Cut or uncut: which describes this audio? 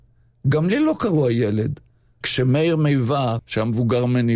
cut